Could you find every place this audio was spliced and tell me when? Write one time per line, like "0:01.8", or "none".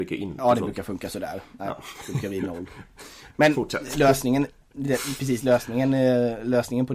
none